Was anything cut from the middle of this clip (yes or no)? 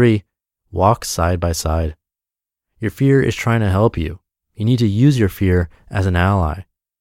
no